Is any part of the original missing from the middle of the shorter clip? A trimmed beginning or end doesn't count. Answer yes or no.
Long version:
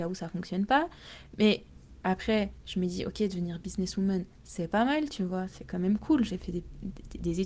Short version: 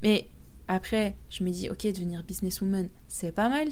no